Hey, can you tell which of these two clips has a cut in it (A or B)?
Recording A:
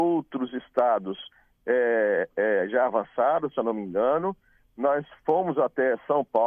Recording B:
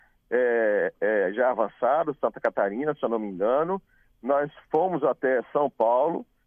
A